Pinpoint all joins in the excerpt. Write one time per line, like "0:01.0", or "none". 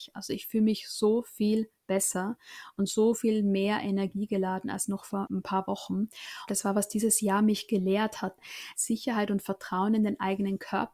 0:06.5
0:08.7